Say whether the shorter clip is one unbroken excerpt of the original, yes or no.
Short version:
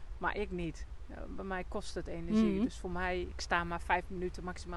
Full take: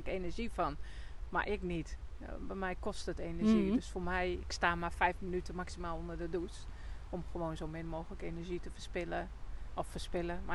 yes